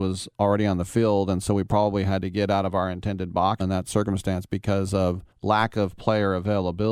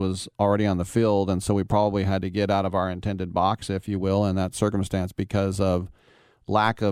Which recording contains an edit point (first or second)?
first